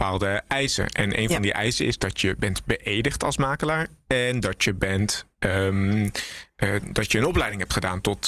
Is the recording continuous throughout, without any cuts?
yes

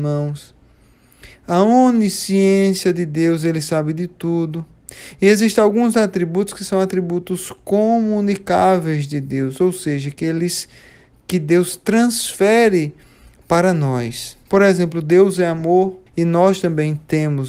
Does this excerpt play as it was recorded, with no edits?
no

